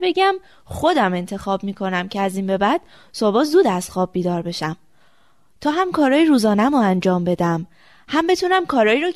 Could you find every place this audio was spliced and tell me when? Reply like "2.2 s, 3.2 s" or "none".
none